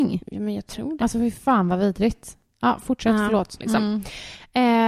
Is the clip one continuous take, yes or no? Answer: no